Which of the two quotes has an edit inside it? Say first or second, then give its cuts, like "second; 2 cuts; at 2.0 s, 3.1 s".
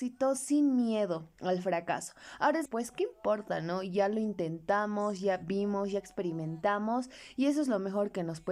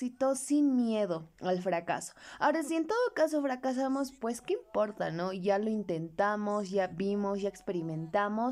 first; 1 cut; at 2.7 s